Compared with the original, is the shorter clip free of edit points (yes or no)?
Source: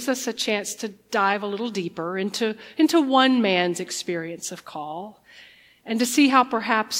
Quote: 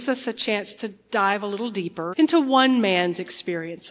no